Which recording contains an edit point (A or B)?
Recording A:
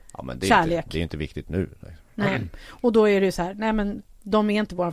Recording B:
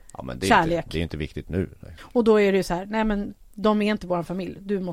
B